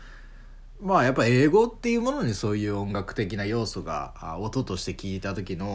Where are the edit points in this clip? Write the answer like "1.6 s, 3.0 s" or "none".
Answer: none

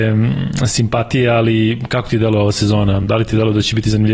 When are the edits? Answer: none

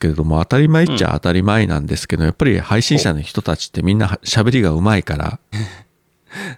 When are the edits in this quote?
5.5 s

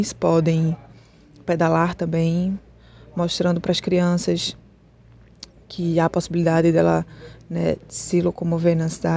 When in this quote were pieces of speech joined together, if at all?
none

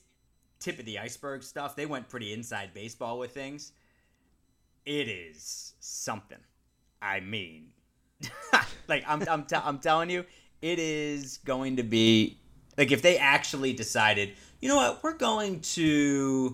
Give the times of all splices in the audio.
none

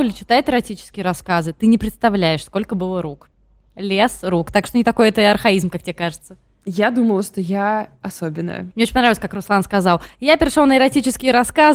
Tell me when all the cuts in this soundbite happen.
8.7 s

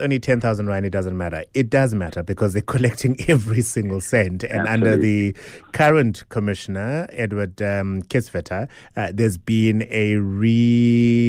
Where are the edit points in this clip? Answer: none

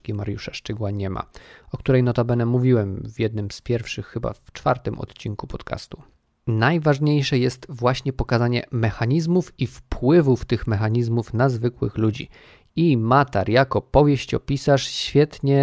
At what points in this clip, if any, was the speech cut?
6.3 s

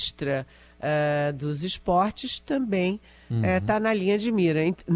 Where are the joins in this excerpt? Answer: none

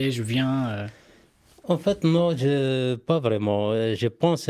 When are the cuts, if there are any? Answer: none

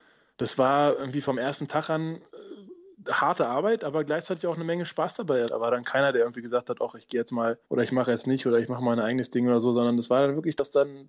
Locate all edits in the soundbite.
5.5 s, 7.6 s

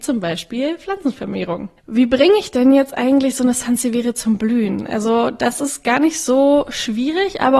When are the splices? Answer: 1.8 s

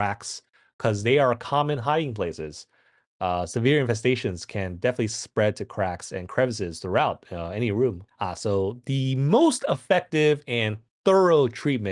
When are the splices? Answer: 8.1 s

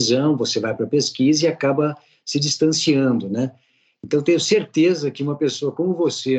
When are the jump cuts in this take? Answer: none

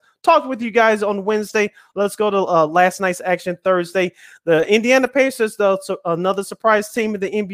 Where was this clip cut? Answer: none

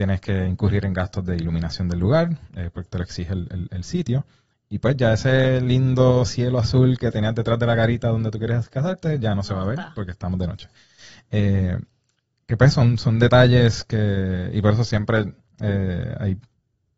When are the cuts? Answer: 2.9 s

